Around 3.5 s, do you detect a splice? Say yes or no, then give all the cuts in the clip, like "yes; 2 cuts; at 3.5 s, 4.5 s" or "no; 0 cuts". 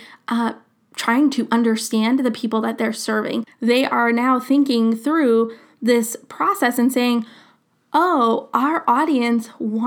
yes; 1 cut; at 3.5 s